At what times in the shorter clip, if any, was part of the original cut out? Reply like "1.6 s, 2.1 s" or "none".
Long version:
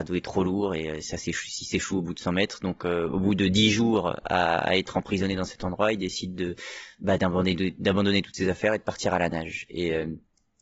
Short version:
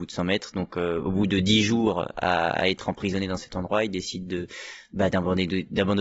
none